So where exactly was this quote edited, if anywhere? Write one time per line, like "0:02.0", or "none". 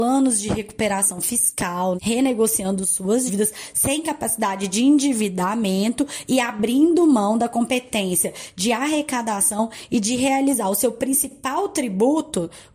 0:02.0
0:03.3